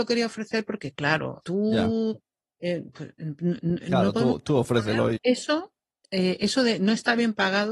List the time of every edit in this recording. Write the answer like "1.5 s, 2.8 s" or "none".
1.4 s, 5.2 s